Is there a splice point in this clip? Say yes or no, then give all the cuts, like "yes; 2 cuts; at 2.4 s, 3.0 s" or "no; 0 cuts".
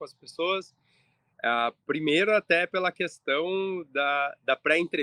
yes; 1 cut; at 1.3 s